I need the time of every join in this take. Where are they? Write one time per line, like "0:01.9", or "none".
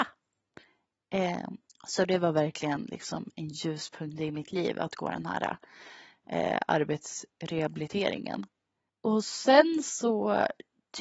0:01.7
0:08.9

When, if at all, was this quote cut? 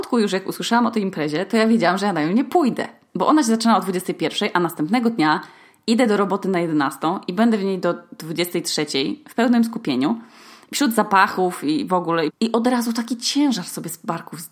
0:12.3

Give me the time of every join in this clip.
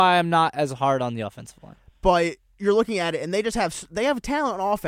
none

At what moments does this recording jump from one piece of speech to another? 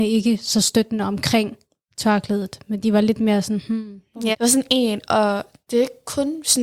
0:04.3

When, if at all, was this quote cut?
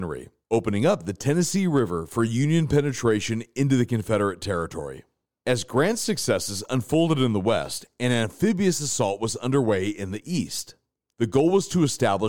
none

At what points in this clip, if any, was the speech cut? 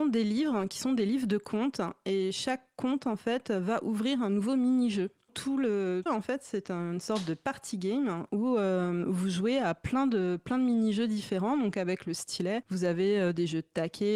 0:06.1

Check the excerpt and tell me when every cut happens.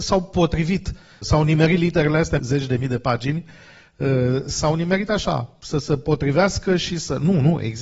0:01.2
0:02.4

